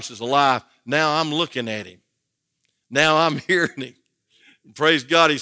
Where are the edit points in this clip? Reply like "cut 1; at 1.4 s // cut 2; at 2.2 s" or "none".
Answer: none